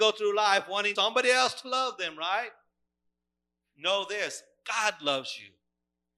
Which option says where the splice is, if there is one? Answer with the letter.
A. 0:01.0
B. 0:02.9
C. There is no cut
A